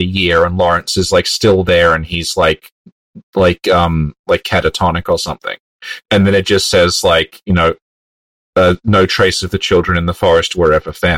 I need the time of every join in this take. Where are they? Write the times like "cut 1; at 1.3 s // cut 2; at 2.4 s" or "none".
cut 1; at 6.0 s